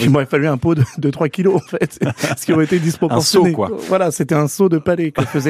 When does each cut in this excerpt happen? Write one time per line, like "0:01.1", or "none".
none